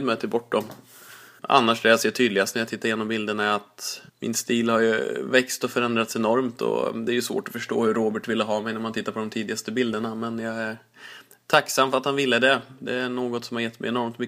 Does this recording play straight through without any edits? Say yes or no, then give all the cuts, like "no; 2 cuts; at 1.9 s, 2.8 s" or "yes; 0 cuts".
no; 2 cuts; at 1.4 s, 4.1 s